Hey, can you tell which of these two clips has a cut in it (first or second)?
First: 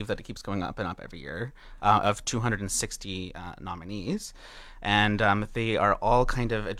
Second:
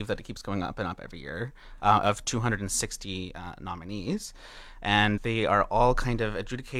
second